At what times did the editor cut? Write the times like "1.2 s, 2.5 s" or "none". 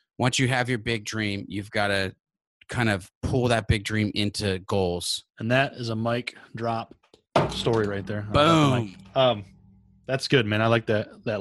5.3 s